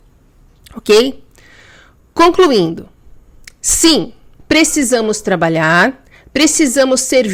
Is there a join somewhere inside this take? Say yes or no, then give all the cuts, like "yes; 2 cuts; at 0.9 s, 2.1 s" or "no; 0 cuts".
yes; 1 cut; at 4.4 s